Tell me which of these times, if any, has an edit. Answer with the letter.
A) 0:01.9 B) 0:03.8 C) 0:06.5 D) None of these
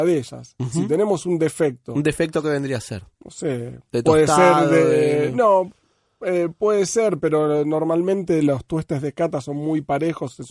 D